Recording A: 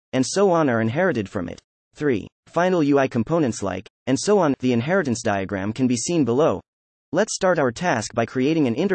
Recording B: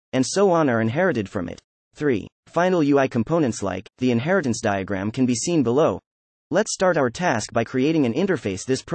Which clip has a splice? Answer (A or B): B